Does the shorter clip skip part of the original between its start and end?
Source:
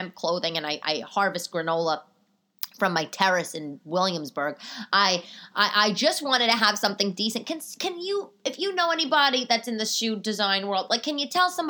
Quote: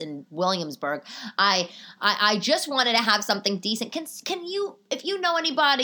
no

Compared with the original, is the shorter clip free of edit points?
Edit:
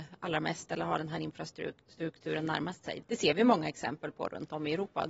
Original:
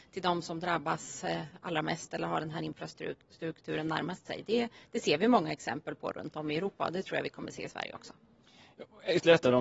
no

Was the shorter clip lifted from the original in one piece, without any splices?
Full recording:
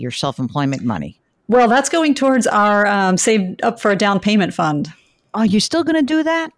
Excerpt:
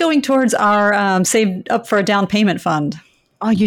yes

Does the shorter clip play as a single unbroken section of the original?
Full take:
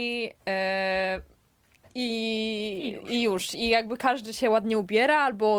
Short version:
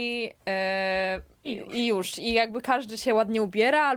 no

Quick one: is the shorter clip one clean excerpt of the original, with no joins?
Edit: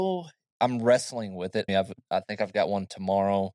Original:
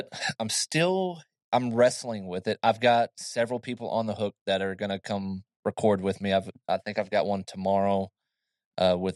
no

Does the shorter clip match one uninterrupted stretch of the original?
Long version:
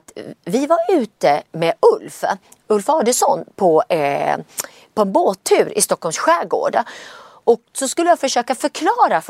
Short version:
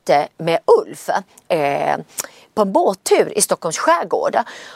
no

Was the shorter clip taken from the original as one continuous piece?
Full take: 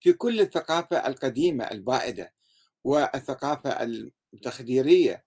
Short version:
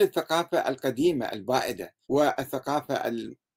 no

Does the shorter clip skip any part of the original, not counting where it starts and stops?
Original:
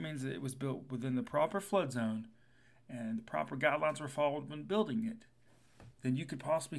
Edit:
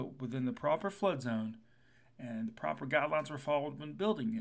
no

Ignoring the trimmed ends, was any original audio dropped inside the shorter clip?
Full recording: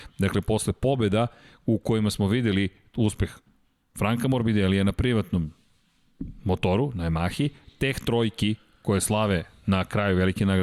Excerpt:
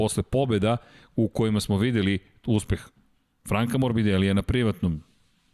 no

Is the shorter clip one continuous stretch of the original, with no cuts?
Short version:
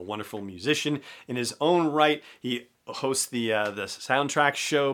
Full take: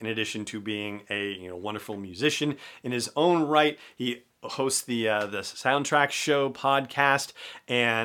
yes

